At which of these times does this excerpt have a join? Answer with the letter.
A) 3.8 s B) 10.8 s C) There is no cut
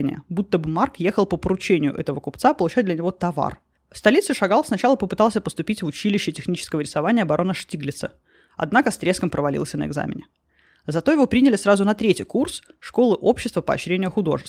A